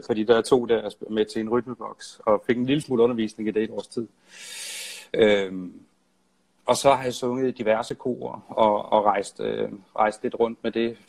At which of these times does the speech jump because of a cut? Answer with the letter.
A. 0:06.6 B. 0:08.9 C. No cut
C